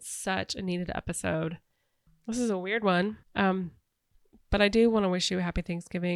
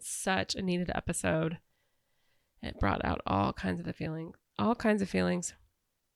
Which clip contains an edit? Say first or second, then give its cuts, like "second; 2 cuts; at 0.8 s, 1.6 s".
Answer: first; 2 cuts; at 2.1 s, 3.2 s